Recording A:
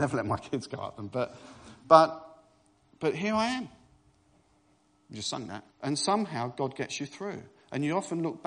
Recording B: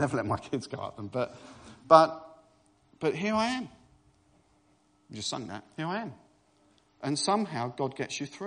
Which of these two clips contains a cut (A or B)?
A